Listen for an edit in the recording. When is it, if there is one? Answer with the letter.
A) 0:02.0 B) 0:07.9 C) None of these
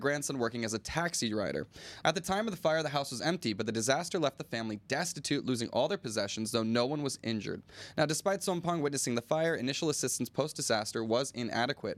A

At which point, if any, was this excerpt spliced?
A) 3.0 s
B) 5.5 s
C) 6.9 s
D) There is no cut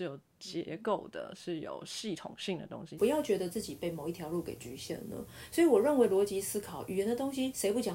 A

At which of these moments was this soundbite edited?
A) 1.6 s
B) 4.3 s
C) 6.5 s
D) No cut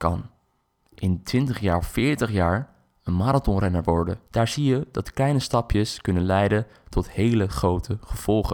B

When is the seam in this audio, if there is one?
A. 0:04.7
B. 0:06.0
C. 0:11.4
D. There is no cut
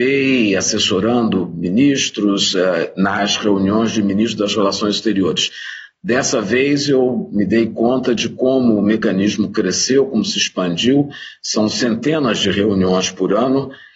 D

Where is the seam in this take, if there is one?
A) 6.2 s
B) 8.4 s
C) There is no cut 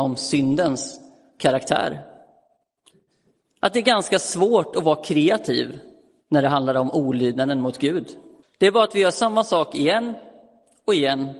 B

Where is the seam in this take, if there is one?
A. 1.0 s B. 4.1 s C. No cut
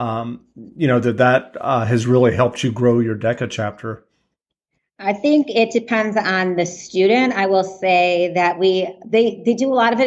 C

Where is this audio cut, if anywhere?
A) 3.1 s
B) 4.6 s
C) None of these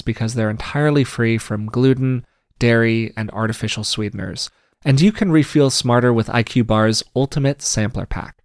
A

